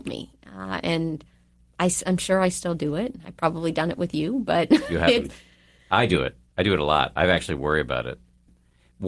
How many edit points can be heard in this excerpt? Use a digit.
0